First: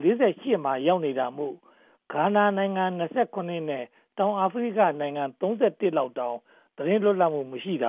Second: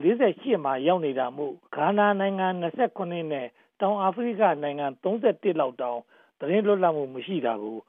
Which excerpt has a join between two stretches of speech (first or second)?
second